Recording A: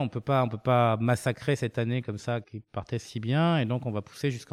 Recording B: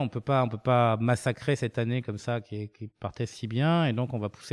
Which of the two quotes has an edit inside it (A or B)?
A